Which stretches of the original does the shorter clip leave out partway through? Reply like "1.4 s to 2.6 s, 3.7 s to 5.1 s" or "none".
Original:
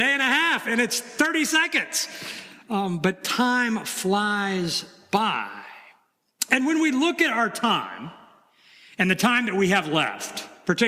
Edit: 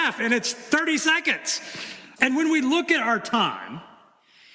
2.6 s to 6.5 s